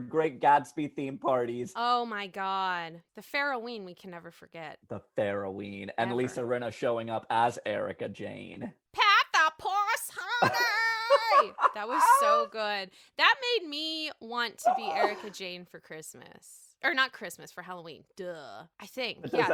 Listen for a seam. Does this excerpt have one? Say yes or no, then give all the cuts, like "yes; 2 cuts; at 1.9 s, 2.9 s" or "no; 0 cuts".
no; 0 cuts